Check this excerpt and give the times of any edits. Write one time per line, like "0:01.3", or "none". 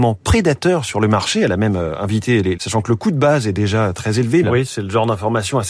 0:02.6
0:04.4